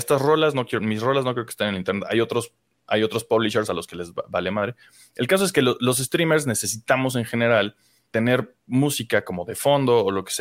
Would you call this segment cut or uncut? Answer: uncut